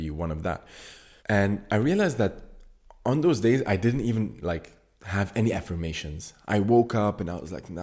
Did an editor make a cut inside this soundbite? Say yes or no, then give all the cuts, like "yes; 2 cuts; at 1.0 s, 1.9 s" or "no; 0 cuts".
yes; 1 cut; at 1.2 s